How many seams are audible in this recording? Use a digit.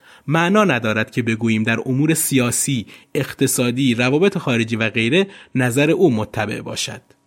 0